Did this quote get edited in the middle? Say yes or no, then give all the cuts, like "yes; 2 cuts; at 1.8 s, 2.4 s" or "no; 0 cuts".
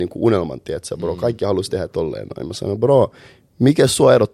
no; 0 cuts